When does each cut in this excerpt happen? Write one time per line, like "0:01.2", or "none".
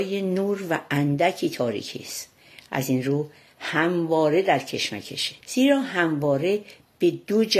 0:05.4